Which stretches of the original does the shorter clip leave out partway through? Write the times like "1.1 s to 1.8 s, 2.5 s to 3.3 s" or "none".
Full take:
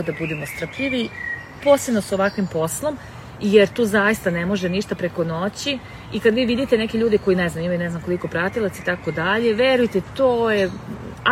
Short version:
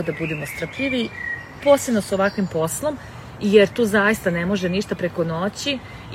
none